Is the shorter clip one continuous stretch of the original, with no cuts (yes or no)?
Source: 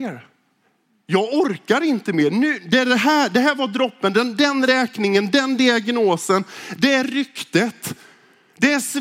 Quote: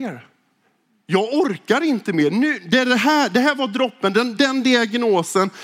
no